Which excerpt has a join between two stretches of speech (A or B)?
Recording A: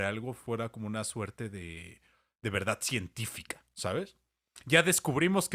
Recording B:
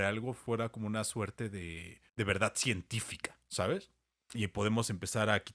B